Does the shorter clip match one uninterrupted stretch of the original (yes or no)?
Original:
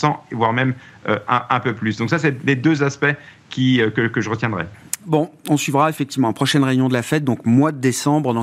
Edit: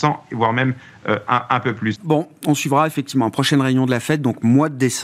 no